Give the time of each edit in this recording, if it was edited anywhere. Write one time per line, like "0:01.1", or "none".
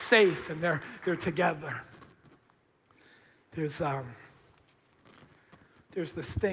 none